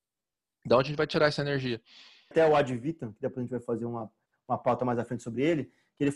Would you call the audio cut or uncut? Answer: uncut